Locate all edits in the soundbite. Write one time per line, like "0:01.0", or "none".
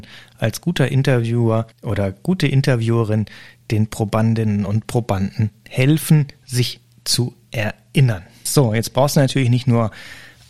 0:01.7
0:08.5